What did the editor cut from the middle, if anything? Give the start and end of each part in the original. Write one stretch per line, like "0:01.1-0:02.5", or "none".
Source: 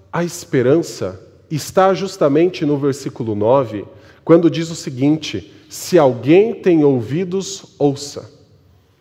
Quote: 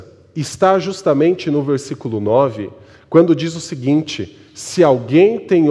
none

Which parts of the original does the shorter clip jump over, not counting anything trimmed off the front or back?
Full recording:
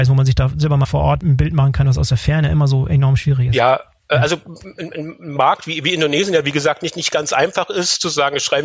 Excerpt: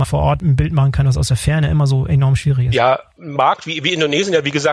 0:04.0-0:05.2

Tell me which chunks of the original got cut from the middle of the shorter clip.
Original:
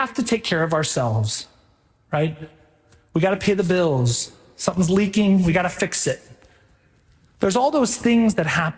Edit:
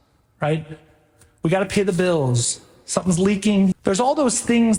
0:05.4-0:07.3

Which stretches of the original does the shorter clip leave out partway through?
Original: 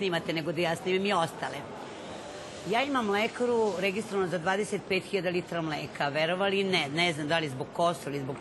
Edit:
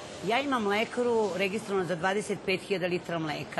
none

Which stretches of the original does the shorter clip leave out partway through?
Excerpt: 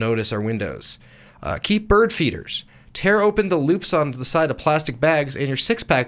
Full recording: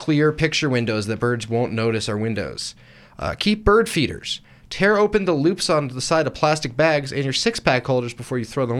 none

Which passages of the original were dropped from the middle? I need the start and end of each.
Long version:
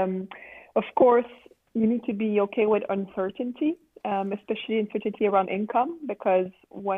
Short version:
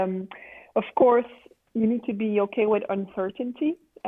none

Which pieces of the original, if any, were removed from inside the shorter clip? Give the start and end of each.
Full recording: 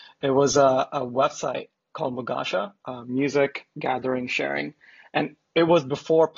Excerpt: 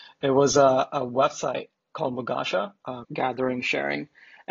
0:03.0-0:03.7

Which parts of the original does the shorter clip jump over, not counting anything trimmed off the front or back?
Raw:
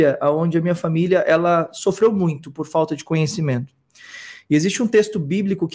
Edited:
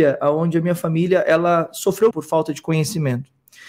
0:02.1-0:02.5

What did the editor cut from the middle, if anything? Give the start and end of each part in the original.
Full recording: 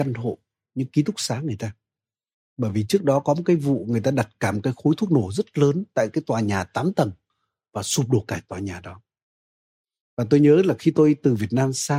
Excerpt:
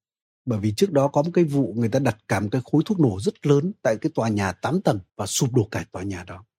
0:07.2-0:07.7

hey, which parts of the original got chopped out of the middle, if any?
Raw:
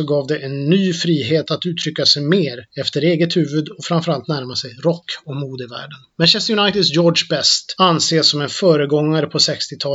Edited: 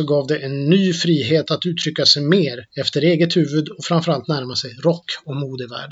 none

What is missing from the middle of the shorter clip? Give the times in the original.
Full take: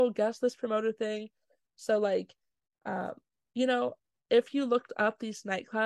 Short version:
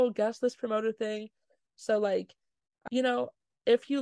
0:02.9-0:03.5

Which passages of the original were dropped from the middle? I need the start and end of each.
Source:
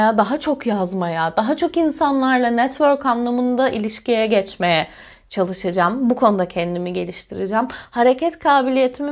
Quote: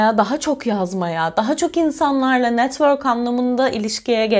none

